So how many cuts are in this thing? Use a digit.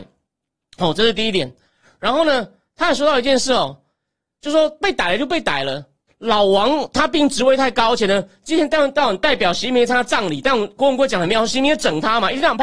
1